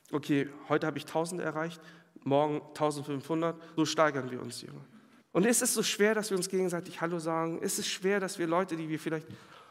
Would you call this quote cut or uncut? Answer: cut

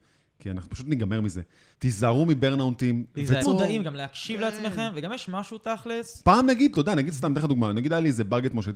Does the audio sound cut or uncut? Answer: cut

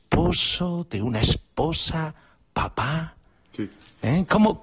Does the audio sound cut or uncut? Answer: uncut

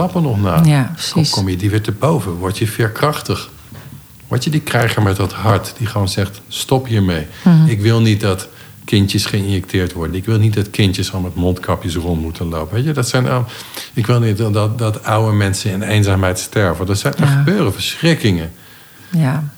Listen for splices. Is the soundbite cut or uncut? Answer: uncut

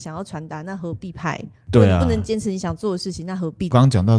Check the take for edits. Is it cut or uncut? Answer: uncut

